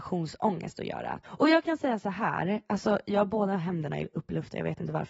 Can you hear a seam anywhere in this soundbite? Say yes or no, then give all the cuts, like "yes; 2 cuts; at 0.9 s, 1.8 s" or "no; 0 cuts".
yes; 1 cut; at 1.2 s